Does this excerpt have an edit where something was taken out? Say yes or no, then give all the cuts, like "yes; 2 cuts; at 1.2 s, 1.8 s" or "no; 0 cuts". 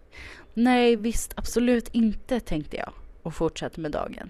no; 0 cuts